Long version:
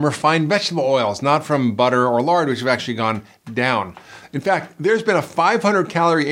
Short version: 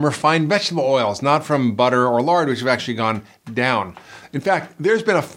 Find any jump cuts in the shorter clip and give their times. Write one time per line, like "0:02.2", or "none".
none